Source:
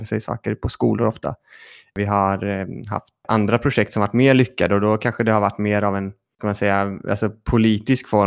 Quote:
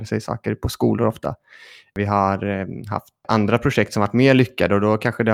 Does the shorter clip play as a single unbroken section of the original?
yes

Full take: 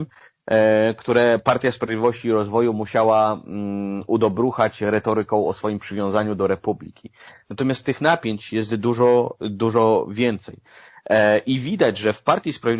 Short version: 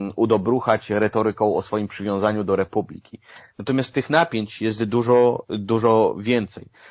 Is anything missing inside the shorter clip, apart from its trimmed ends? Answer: no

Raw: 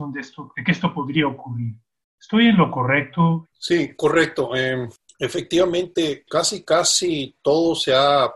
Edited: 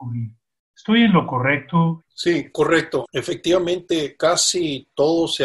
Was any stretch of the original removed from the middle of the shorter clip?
yes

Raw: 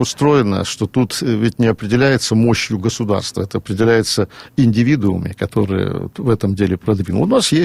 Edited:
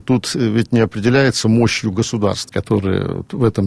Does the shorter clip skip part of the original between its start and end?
yes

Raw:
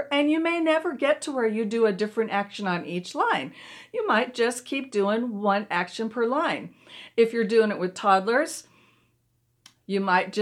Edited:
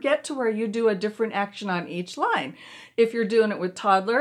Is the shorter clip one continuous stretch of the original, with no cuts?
no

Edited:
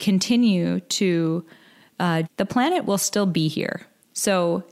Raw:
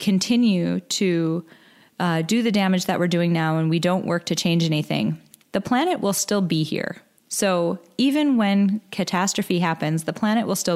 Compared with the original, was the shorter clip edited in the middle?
yes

